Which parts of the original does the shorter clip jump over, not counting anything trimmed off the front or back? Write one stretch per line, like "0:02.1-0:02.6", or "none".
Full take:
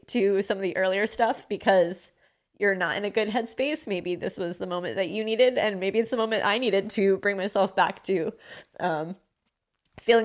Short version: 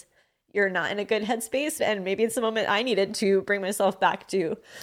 0:03.8-0:05.5